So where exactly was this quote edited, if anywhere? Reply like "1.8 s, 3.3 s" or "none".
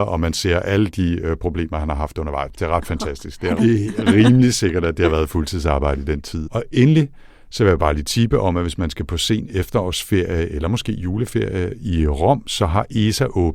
3.6 s, 6.5 s